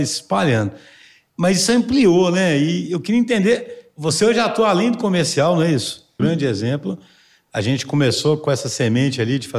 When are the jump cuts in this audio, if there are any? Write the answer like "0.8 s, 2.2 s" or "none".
6.2 s